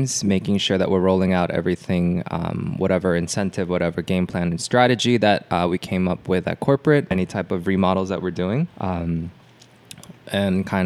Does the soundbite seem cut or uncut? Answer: cut